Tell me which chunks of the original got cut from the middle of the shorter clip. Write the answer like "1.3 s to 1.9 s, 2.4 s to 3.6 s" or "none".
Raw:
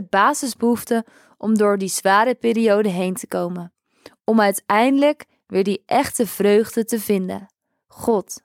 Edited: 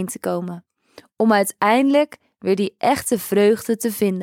none